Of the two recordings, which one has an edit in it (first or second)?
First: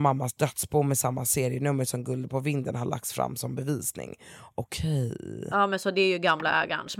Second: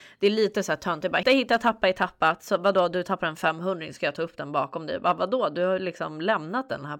second